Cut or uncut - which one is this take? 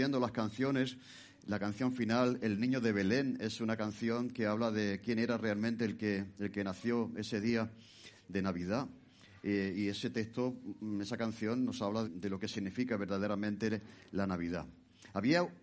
cut